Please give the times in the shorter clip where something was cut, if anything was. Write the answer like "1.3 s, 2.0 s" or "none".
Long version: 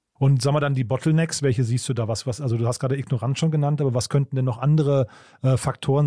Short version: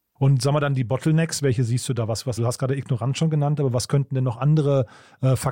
2.4 s